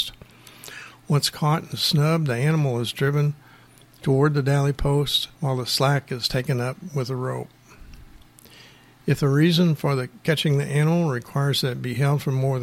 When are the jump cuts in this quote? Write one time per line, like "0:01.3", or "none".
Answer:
0:05.3